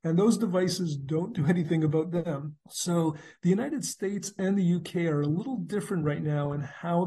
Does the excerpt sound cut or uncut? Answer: cut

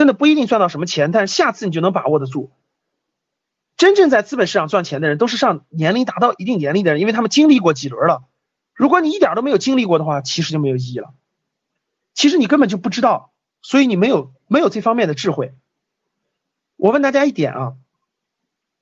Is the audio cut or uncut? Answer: uncut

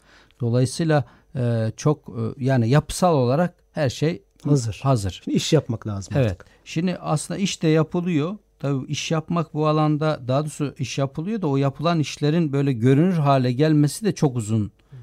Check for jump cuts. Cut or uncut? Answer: uncut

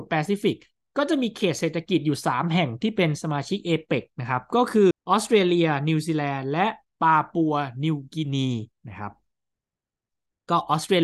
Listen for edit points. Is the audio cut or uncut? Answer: cut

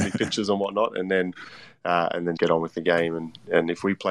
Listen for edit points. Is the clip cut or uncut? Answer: cut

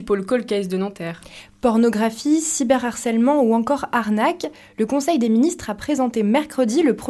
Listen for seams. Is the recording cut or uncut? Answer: uncut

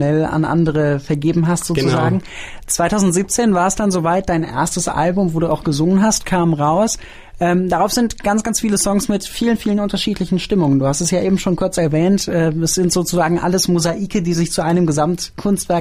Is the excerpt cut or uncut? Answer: uncut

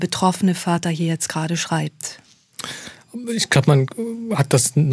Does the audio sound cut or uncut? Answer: uncut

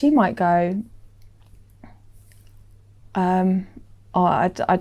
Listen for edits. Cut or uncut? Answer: uncut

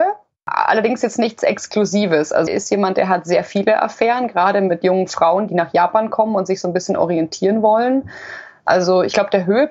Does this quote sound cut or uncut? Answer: cut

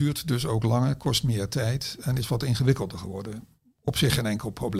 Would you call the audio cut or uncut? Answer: uncut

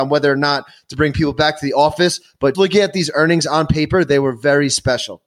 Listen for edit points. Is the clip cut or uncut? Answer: cut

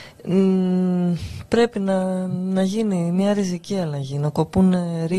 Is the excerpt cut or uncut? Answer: uncut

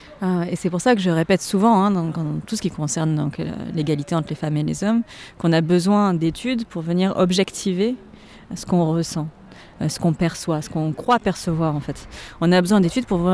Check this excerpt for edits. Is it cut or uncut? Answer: uncut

